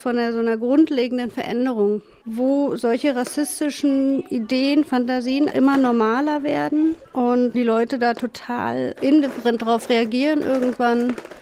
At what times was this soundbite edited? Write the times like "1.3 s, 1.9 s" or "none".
5.5 s